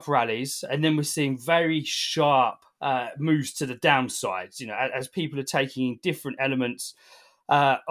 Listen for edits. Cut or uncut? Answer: uncut